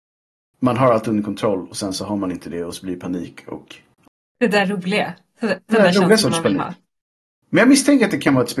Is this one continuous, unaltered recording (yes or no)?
yes